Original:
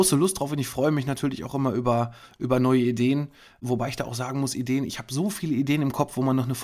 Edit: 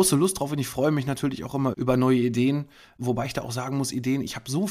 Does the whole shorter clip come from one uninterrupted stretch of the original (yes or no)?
no